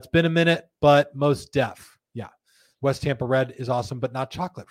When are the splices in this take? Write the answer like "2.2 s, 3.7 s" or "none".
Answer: 2.7 s